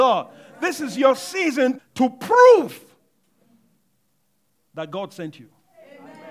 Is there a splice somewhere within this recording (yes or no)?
yes